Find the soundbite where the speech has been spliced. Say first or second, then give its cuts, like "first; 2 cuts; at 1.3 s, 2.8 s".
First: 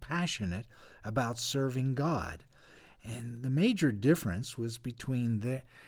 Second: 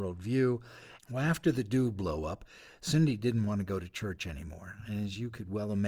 second; 1 cut; at 1.0 s